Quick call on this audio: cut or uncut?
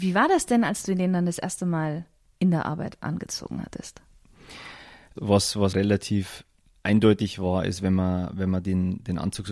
cut